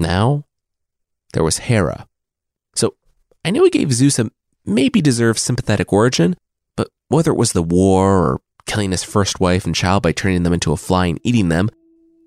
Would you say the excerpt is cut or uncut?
uncut